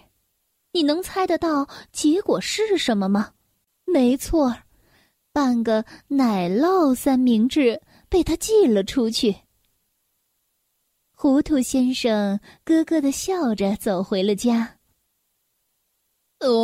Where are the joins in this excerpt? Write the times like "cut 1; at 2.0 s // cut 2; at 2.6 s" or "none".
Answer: none

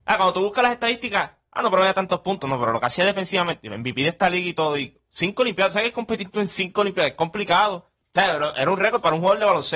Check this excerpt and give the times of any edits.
none

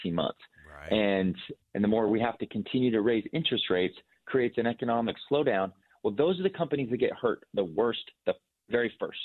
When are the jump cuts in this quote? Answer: cut 1; at 1.6 s

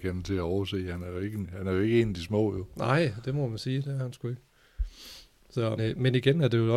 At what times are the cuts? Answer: cut 1; at 5.8 s

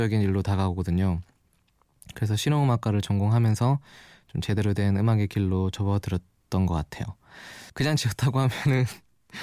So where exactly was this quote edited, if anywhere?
cut 1; at 7.7 s

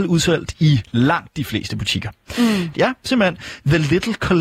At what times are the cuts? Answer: cut 1; at 2.7 s

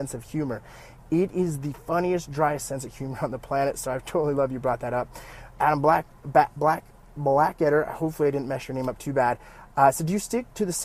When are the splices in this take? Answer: none

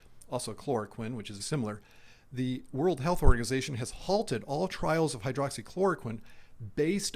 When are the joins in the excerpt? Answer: cut 1; at 1.4 s

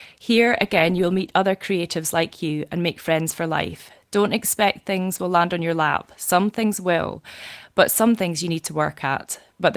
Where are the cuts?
none

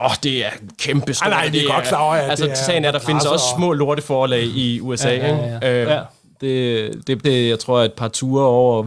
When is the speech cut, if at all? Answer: cut 1; at 5.8 s // cut 2; at 7.2 s

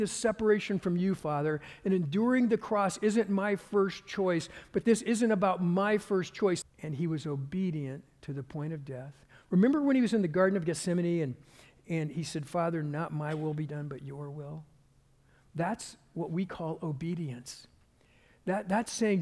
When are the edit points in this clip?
cut 1; at 6.6 s

